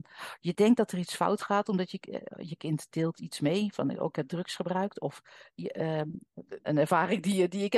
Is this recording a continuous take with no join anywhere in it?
no; 1 cut; at 6.6 s

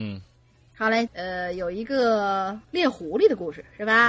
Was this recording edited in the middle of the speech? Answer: yes; 2 cuts; at 1.1 s, 2.6 s

